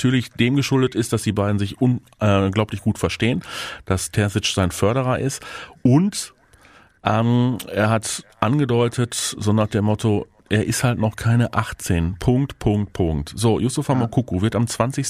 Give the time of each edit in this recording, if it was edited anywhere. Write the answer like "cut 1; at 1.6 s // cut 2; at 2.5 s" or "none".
none